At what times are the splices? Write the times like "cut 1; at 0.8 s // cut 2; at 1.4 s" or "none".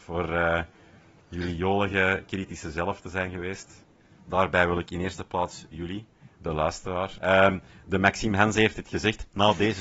cut 1; at 4.2 s // cut 2; at 7.2 s